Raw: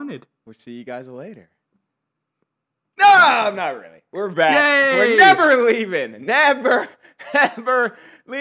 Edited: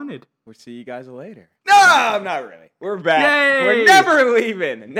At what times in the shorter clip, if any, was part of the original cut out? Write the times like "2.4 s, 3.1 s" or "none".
1.6 s